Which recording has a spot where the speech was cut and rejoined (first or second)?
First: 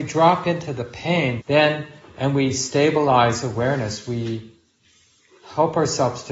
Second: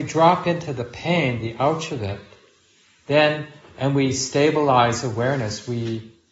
first